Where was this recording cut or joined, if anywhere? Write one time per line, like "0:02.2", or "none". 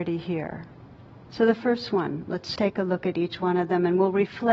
0:01.3
0:02.6